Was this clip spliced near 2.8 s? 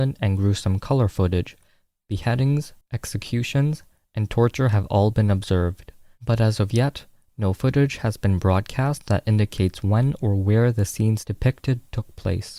yes; 1 cut; at 2.8 s

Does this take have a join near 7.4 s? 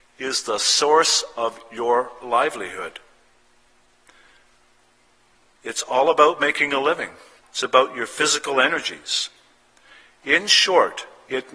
yes; 1 cut; at 7.4 s

